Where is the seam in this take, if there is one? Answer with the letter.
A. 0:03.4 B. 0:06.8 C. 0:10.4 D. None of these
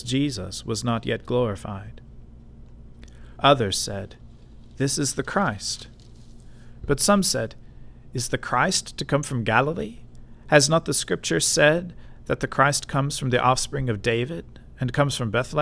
A